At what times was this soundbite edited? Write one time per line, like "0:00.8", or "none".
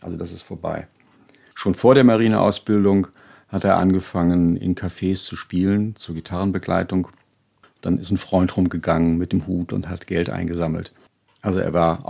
none